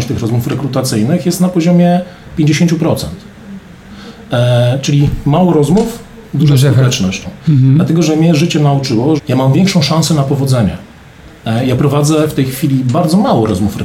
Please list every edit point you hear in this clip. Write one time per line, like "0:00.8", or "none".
0:07.2
0:09.2